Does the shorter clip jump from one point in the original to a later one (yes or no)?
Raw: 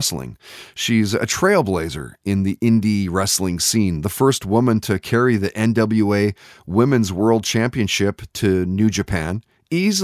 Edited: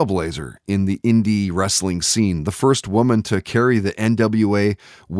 no